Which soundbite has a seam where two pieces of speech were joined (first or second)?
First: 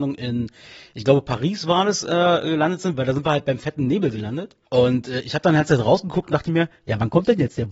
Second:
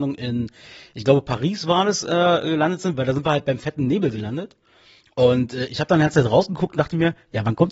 first